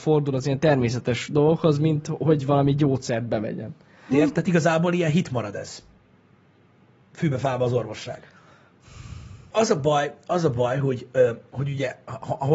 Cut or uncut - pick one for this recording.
cut